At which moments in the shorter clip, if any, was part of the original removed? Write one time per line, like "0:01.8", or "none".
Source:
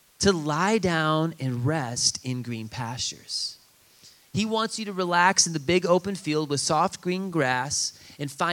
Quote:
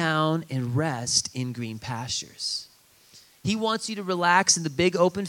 none